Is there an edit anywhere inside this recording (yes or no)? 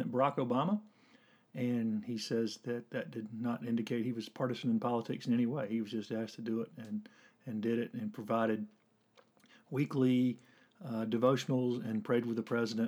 no